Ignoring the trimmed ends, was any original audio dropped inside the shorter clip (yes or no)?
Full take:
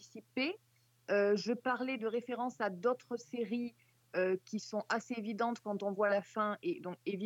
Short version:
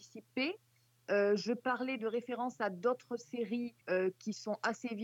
yes